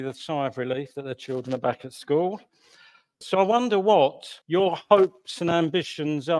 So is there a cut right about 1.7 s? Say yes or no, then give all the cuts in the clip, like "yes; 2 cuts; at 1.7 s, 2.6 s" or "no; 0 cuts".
no; 2 cuts; at 3.2 s, 4.4 s